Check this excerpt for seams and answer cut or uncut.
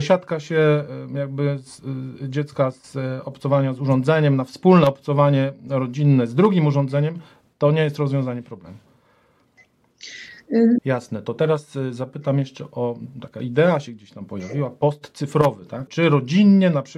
cut